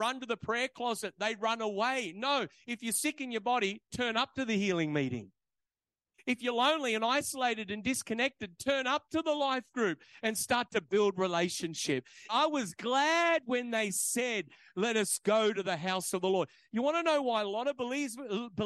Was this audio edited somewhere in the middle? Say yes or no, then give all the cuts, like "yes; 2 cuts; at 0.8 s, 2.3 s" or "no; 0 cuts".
yes; 1 cut; at 12.3 s